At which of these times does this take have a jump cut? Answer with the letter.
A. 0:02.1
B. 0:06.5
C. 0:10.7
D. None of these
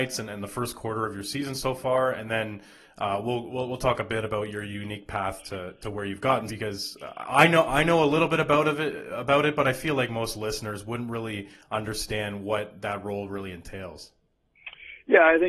B